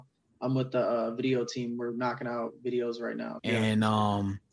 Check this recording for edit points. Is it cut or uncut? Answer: cut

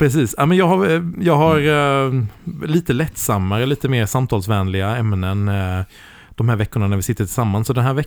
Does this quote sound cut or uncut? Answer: uncut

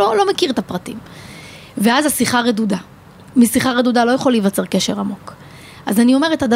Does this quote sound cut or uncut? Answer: uncut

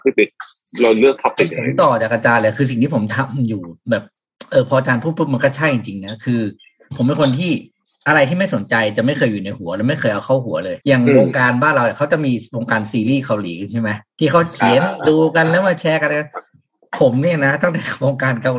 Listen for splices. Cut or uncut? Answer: cut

